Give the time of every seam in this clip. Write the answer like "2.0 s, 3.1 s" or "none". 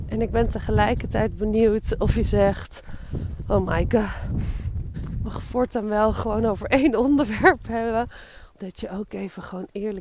4.9 s, 8.5 s